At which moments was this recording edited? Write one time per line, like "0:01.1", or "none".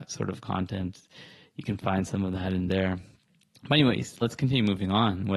0:04.2